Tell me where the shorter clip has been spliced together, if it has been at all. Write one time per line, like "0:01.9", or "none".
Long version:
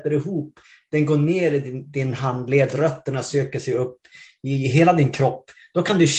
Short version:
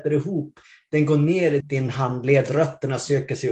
0:01.6